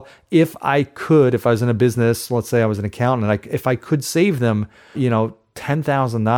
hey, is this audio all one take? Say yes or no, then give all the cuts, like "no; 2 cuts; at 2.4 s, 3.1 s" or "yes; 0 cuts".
no; 1 cut; at 4.9 s